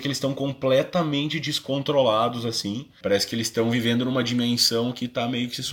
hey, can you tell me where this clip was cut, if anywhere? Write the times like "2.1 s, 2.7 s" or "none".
3.0 s